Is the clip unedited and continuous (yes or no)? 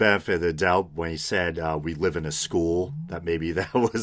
yes